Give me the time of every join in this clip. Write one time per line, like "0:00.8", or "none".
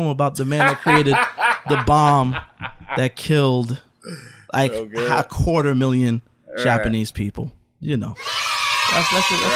none